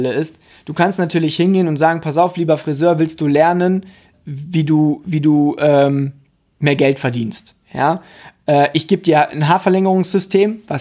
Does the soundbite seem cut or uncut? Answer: cut